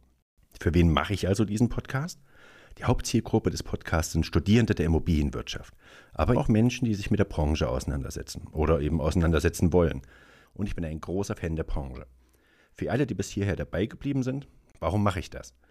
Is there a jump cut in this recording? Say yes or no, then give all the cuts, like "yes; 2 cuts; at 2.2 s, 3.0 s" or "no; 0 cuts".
yes; 2 cuts; at 6.3 s, 10.4 s